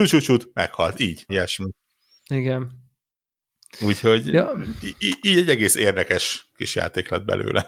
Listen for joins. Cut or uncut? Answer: cut